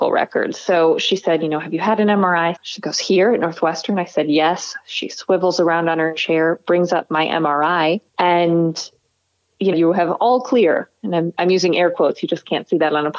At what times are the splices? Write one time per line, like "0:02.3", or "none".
0:02.6
0:08.1
0:09.7